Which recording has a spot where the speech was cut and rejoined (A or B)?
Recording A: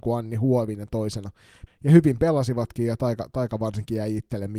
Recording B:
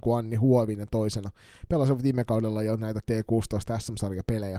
A